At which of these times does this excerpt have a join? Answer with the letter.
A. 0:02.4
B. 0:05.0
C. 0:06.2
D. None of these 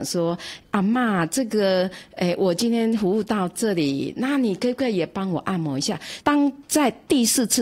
C